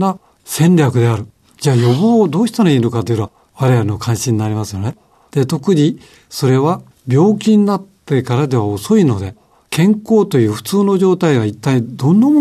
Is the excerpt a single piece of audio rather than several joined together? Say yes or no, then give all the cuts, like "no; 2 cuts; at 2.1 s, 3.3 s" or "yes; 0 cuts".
no; 2 cuts; at 1.4 s, 5.2 s